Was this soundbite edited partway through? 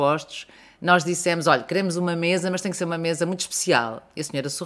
no; 0 cuts

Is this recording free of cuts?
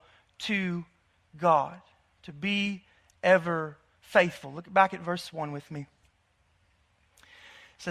yes; 0 cuts

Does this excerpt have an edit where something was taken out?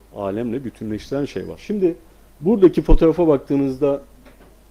no; 0 cuts

